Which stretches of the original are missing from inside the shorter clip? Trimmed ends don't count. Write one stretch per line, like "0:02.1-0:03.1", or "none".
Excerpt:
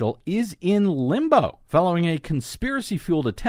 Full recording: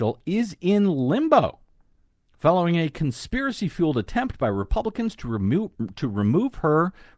0:01.6-0:02.3